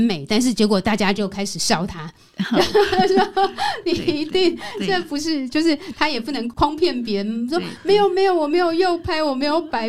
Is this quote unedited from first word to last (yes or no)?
yes